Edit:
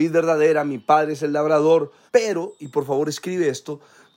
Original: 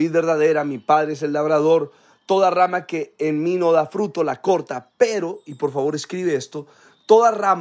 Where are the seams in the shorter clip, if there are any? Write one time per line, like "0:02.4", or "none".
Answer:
0:02.1